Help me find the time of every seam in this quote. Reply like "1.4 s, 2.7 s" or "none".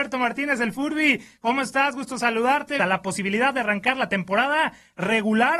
2.8 s